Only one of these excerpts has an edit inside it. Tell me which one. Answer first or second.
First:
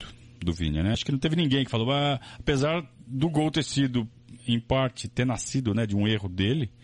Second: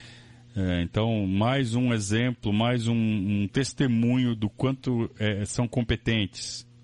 first